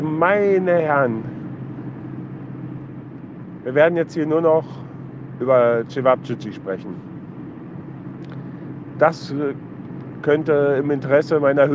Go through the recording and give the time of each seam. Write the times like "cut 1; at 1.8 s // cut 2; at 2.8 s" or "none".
none